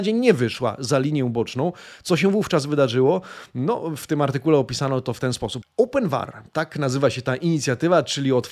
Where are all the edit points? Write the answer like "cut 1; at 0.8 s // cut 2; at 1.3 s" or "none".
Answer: cut 1; at 5.6 s